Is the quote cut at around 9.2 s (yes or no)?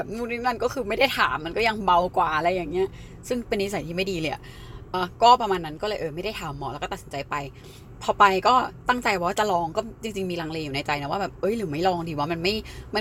no